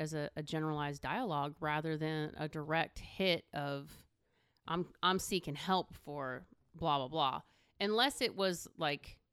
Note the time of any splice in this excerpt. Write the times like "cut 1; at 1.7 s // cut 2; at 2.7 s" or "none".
none